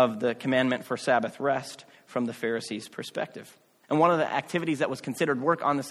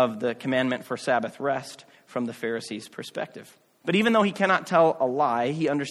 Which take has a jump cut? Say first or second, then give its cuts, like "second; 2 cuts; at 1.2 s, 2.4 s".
second; 1 cut; at 3.8 s